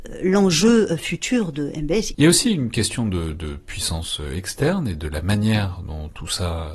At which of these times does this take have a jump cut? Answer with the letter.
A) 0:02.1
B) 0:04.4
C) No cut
A